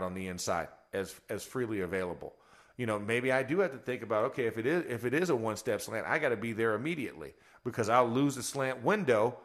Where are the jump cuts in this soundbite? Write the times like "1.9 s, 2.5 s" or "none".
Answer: none